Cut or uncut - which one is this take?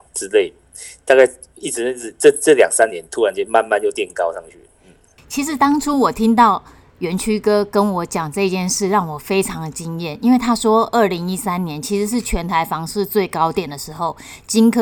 uncut